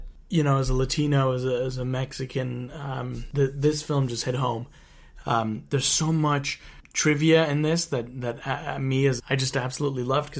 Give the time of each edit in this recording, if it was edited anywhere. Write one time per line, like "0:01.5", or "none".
0:05.2
0:09.2